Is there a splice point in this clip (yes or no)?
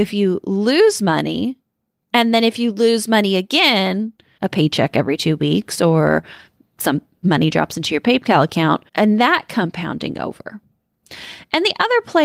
yes